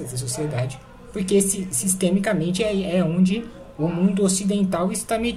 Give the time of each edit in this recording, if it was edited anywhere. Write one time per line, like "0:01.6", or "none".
none

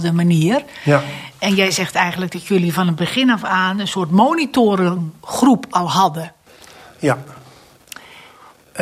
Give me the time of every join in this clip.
none

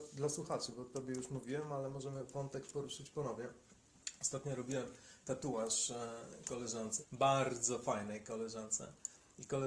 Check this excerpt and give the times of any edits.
0:07.0

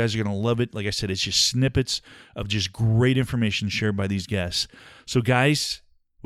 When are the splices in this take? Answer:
none

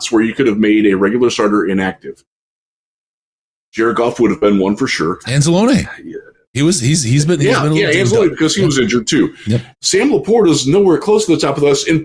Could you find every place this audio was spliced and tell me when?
0:05.2
0:09.7

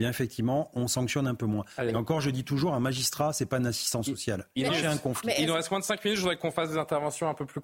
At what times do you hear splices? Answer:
0:04.7

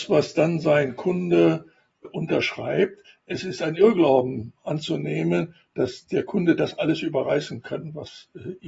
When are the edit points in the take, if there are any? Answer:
0:02.0

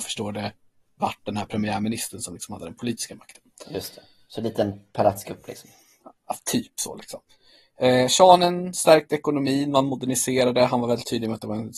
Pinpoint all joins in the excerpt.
none

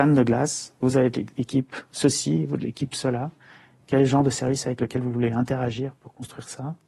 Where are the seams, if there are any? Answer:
none

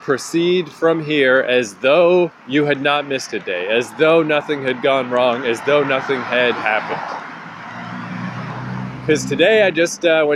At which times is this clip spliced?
0:02.4

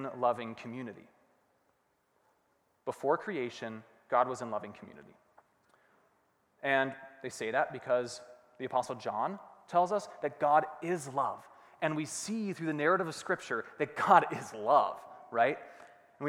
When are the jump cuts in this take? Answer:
none

